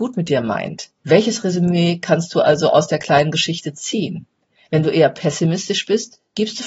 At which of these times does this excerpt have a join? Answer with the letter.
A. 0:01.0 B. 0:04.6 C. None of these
A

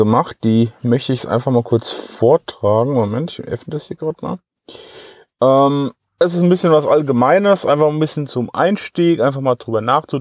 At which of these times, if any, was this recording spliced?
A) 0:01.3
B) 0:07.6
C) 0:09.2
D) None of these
D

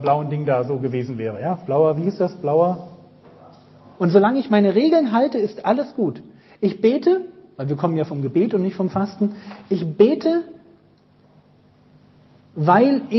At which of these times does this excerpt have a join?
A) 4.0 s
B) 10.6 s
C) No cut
A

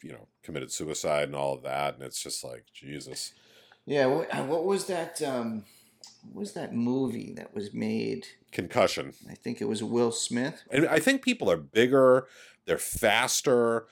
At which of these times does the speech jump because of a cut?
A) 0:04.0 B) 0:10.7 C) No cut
B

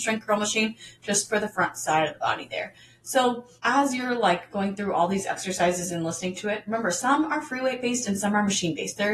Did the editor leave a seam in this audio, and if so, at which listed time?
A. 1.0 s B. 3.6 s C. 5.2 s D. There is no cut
B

